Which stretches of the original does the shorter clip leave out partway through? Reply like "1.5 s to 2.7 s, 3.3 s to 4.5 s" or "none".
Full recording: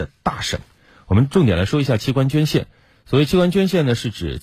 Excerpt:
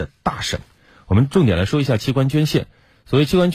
none

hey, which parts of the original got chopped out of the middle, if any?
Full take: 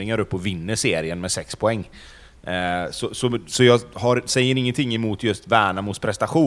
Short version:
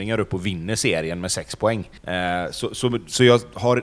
2.0 s to 2.4 s

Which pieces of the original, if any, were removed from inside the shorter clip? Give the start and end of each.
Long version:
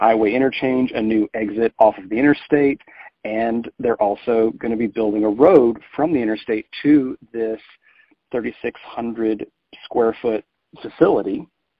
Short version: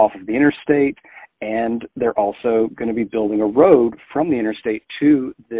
none

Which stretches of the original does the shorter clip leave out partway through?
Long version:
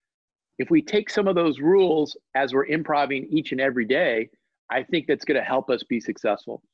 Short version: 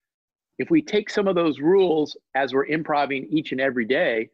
none

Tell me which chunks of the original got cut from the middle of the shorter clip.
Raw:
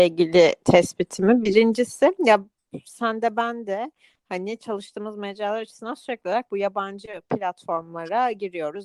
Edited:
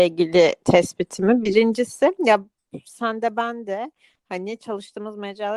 none

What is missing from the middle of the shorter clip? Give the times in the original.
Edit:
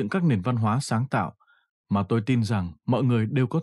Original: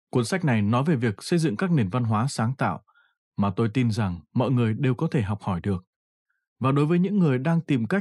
none

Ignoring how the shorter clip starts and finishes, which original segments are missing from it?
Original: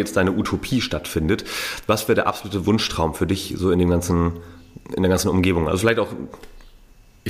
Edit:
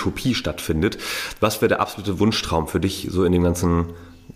none

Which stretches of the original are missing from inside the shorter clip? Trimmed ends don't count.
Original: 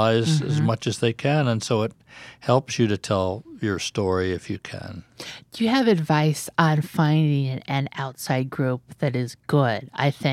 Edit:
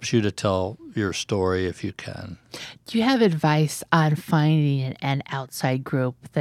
none

